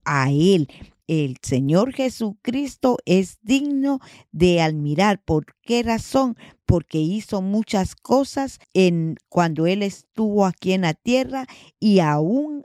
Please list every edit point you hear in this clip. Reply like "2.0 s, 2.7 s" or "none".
1.0 s, 8.6 s